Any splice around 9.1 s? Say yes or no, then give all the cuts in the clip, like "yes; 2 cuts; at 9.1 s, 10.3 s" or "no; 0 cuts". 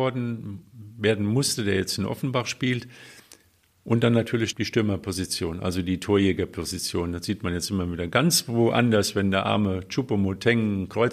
no; 1 cut; at 4.5 s